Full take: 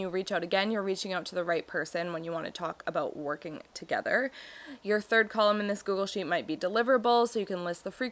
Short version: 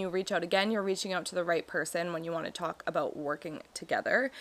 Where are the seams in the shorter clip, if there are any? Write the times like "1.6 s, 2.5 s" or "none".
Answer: none